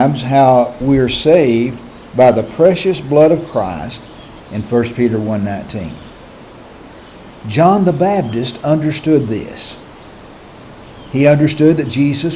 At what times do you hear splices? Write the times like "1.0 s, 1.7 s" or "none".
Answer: 4.4 s